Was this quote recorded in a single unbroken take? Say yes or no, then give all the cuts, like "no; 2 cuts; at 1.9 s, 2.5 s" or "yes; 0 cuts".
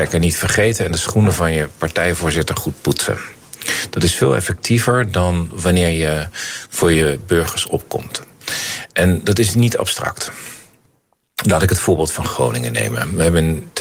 yes; 0 cuts